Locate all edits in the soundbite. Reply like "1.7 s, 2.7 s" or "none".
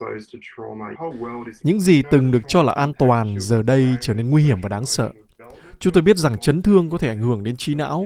1.6 s